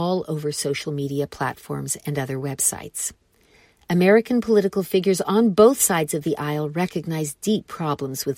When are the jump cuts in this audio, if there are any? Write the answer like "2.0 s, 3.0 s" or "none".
none